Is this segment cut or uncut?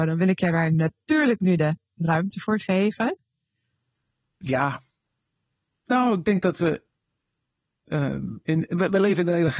cut